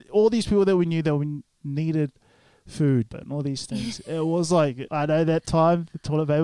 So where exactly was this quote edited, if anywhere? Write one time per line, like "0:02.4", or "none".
0:03.1
0:04.9